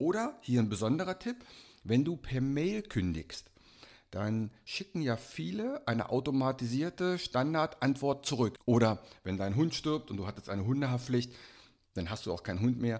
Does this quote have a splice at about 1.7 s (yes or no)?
no